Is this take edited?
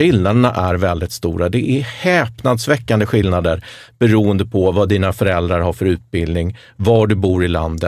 no; 0 cuts

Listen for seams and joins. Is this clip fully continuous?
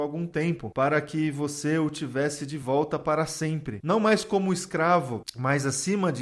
yes; 0 cuts

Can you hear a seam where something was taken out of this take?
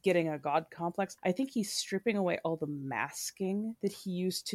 no; 0 cuts

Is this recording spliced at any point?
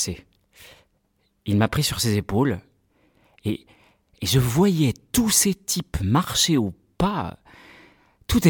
no; 0 cuts

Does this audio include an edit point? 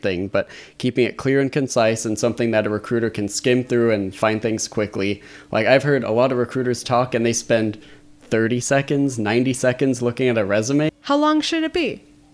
yes; 1 cut; at 10.9 s

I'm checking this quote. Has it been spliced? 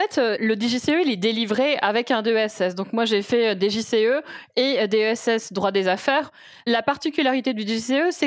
no; 0 cuts

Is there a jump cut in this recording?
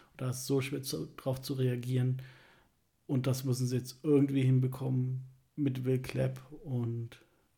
no; 0 cuts

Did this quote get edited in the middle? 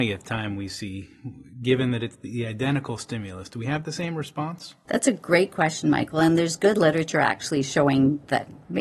no; 0 cuts

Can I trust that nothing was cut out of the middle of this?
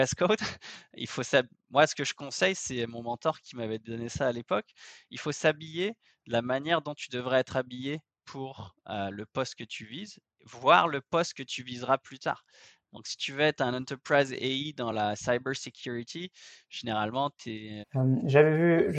no; 1 cut; at 17.8 s

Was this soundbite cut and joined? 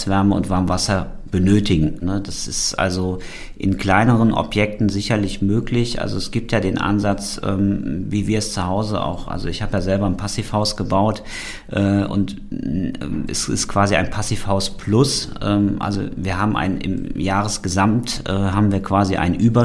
yes; 1 cut; at 2.0 s

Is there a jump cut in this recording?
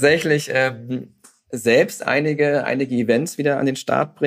no; 0 cuts

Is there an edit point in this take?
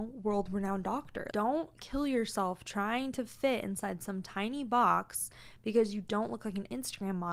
yes; 1 cut; at 1.3 s

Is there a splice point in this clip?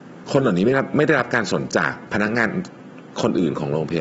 yes; 1 cut; at 1.7 s

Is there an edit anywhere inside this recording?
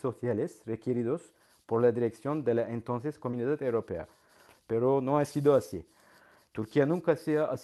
no; 0 cuts

